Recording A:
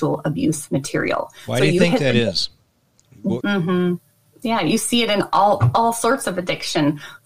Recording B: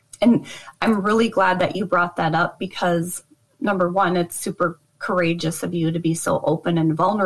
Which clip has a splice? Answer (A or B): A